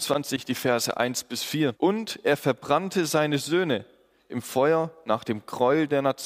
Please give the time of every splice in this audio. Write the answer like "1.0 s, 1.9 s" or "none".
1.7 s